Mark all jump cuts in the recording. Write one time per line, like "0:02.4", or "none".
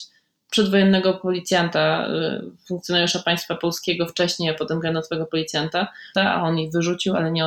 0:06.2